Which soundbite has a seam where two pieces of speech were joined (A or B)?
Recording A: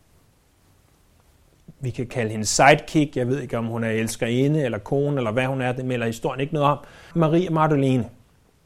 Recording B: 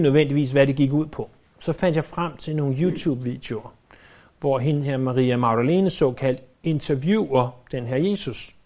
A